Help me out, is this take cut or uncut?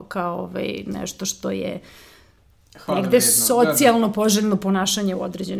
uncut